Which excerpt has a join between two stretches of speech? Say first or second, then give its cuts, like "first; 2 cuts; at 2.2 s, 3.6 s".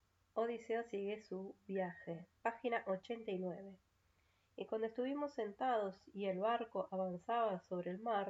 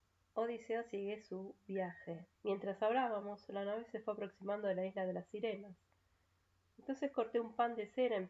second; 1 cut; at 2.3 s